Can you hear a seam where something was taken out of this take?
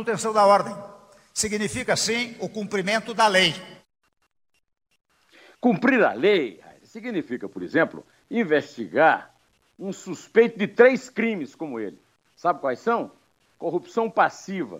no; 0 cuts

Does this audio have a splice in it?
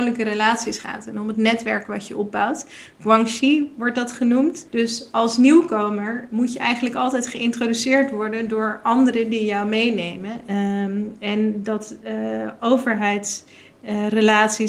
yes; 2 cuts; at 4.6 s, 10.5 s

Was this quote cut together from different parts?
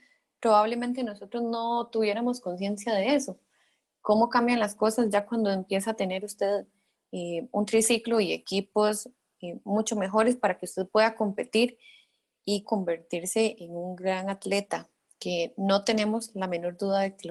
yes; 1 cut; at 12.6 s

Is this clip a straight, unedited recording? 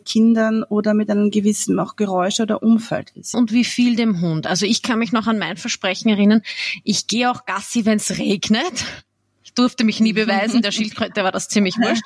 no; 1 cut; at 3.3 s

